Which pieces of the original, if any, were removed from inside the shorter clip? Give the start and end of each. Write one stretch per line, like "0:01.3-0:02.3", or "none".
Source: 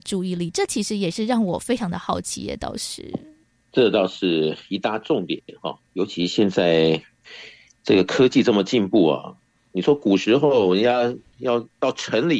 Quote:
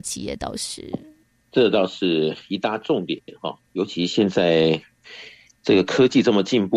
none